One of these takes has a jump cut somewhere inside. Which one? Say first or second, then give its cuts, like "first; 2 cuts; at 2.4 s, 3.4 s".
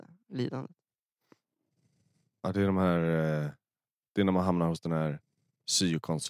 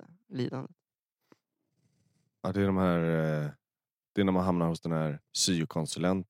second; 1 cut; at 5.2 s